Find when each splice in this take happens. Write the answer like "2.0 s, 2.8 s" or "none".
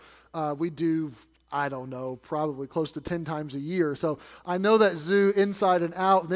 none